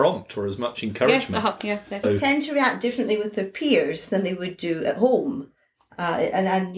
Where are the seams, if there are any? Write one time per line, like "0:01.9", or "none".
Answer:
0:02.0